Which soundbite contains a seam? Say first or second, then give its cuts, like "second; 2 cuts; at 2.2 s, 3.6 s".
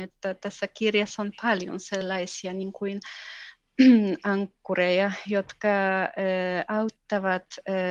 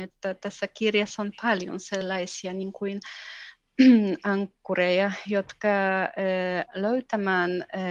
second; 1 cut; at 6.7 s